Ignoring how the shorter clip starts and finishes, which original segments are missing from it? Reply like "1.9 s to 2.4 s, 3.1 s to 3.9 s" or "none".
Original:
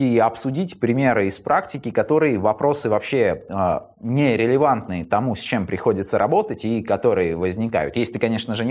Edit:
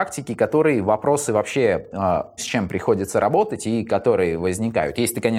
3.9 s to 5.4 s